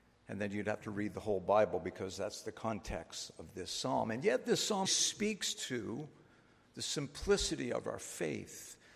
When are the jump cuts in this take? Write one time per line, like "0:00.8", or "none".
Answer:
0:04.8